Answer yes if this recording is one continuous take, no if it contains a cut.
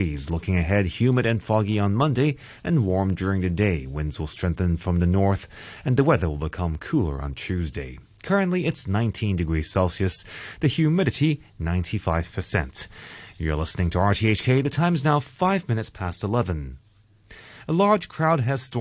yes